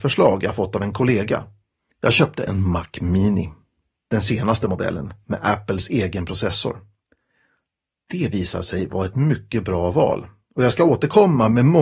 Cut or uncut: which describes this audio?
uncut